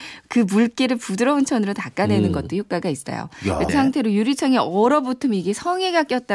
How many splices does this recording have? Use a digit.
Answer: 1